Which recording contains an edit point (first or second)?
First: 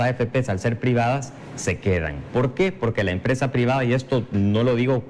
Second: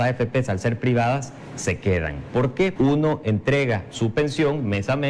second